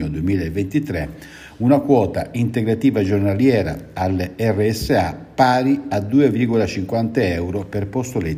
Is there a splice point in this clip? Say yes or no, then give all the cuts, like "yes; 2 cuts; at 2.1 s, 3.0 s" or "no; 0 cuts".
no; 0 cuts